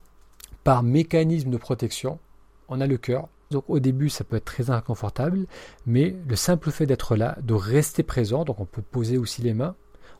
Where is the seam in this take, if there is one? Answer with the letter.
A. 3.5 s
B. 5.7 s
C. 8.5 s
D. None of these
A